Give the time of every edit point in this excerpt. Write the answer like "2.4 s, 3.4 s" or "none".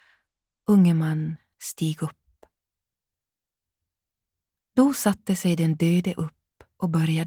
1.5 s